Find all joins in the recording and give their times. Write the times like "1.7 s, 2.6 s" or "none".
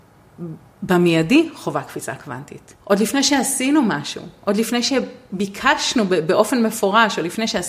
2.8 s